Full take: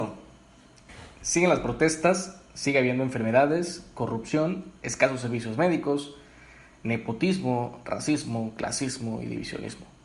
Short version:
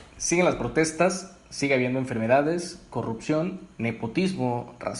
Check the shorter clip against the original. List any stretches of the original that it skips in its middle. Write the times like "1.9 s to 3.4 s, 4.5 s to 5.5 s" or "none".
4.8 s to 6.8 s